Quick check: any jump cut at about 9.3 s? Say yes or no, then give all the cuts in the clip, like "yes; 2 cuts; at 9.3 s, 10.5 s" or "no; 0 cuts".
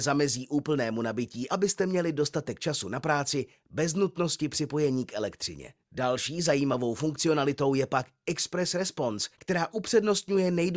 yes; 3 cuts; at 1.5 s, 5.8 s, 9.3 s